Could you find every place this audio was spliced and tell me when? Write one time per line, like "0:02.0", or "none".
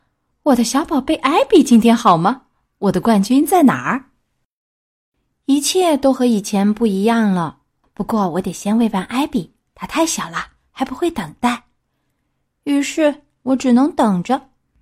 0:07.8